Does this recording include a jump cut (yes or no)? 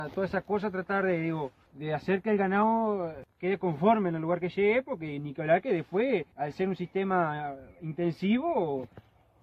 no